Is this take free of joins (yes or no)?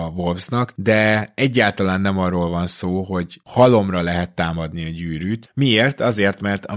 yes